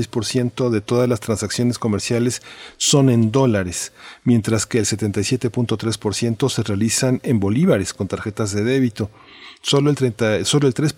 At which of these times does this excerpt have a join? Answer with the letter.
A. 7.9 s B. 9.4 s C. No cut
C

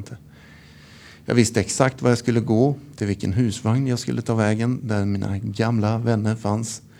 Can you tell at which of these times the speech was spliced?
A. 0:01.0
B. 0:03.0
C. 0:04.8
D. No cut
D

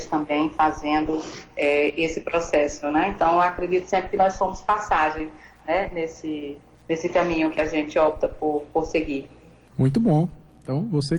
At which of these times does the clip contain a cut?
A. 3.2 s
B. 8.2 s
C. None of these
C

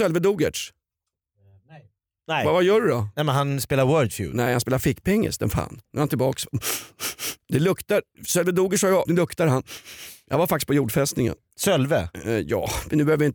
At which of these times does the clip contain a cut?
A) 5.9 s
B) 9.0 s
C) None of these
B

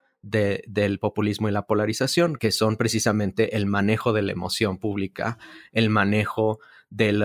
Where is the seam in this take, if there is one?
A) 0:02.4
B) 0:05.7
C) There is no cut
A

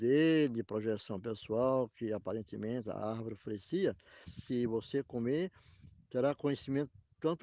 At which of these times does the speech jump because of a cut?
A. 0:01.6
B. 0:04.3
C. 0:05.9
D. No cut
B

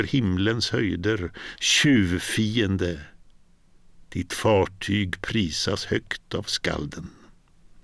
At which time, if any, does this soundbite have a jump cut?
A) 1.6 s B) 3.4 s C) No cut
A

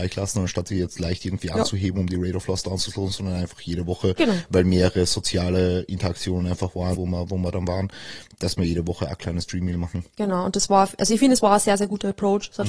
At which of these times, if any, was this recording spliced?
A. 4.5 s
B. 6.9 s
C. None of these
B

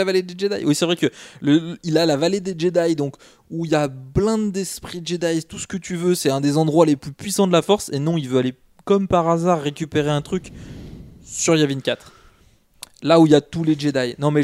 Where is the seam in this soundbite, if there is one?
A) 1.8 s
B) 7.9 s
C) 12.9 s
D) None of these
D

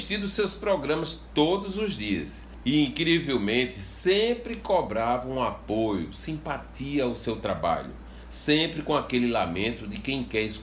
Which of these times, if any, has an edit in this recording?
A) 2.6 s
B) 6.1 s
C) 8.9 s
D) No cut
A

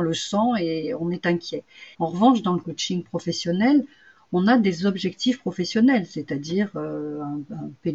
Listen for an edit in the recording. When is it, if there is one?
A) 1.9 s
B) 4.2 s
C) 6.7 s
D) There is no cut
A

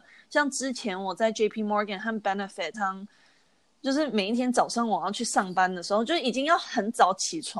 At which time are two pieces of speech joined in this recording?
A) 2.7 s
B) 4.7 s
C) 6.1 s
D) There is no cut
A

